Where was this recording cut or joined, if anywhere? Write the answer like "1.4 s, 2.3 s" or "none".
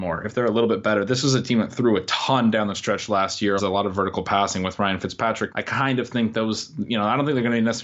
3.6 s, 5.5 s